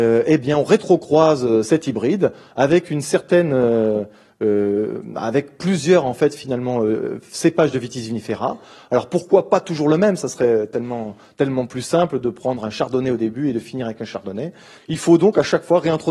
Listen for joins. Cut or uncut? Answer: cut